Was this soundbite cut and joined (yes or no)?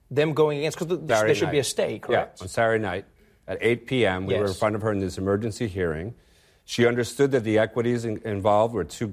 yes